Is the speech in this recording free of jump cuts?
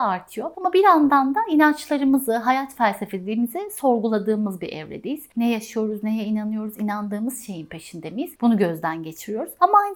yes; 0 cuts

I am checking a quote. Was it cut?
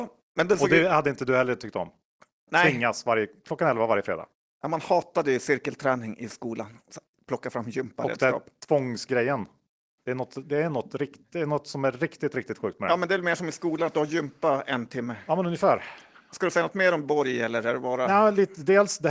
no; 0 cuts

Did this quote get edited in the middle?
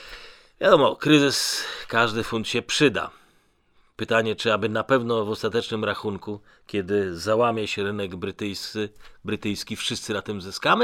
no; 0 cuts

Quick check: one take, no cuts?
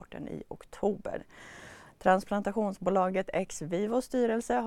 no; 1 cut; at 1.9 s

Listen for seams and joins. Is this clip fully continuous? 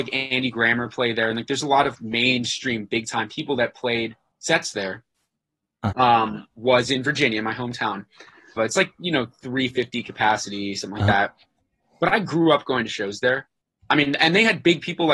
no; 3 cuts; at 1.9 s, 5.9 s, 8.6 s

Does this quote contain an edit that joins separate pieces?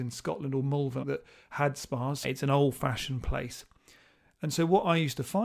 yes; 2 cuts; at 1.0 s, 2.2 s

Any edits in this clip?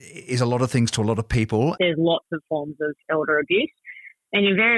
yes; 1 cut; at 1.8 s

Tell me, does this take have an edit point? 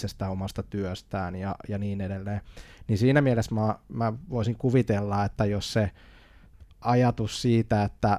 no; 0 cuts

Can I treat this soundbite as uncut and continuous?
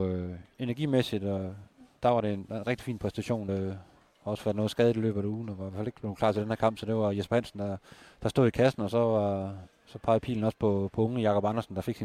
no; 1 cut; at 3.5 s

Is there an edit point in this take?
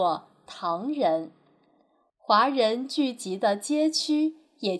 no; 0 cuts

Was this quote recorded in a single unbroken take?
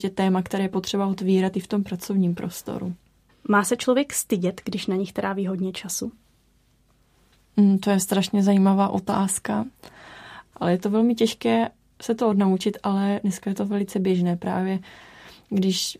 no; 2 cuts; at 3.3 s, 10.5 s

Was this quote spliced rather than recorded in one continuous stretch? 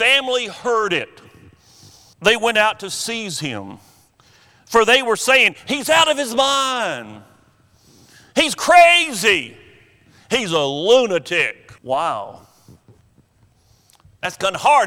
yes; 2 cuts; at 2.1 s, 11.8 s

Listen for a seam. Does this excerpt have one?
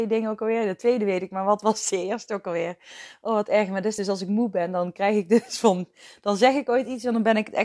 no; 0 cuts

